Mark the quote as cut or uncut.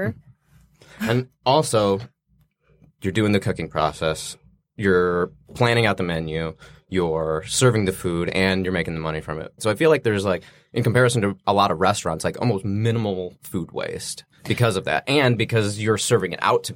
cut